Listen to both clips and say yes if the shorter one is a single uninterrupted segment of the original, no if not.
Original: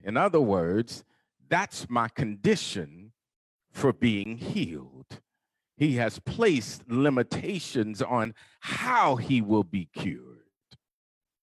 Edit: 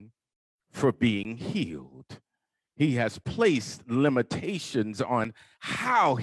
yes